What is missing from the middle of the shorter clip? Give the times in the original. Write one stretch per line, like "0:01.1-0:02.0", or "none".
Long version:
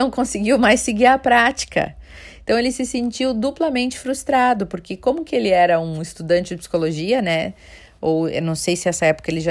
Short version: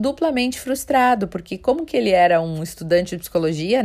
none